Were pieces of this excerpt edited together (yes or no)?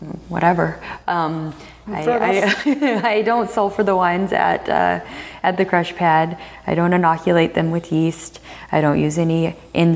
no